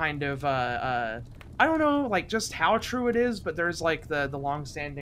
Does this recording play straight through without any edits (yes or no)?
yes